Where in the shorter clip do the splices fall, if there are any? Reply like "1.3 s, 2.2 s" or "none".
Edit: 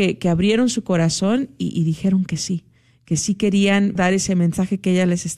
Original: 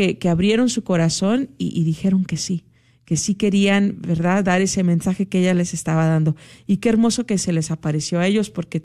4.0 s